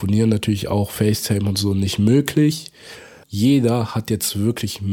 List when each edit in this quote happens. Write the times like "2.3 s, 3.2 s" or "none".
3.2 s